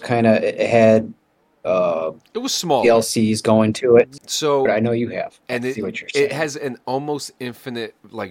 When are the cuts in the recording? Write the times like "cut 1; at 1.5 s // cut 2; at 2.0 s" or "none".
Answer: cut 1; at 4.2 s // cut 2; at 5.5 s